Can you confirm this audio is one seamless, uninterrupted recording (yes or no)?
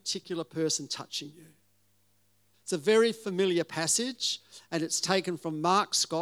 no